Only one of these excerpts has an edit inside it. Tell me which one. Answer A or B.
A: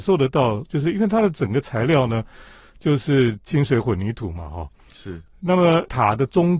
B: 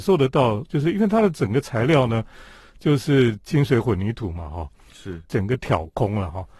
B